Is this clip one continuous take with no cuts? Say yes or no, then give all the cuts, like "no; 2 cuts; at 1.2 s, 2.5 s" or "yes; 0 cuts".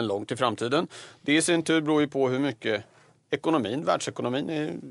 yes; 0 cuts